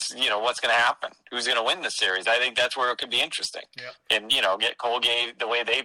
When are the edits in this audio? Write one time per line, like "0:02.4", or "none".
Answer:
none